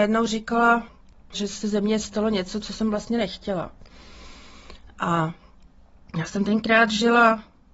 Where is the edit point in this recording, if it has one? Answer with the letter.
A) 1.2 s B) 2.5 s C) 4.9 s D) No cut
D